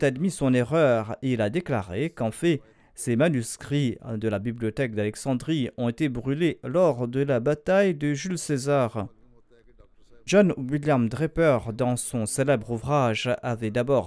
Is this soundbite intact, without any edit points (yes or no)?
no